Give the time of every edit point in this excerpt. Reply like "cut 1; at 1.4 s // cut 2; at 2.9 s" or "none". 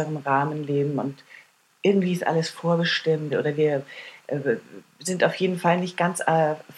cut 1; at 3.3 s